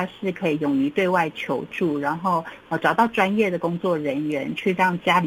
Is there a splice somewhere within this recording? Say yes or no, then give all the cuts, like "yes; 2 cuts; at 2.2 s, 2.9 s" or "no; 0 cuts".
no; 0 cuts